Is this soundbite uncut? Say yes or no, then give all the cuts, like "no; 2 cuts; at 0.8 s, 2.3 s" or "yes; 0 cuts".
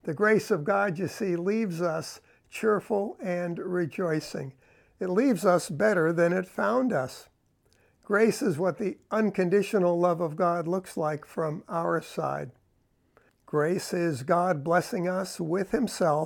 no; 1 cut; at 13.3 s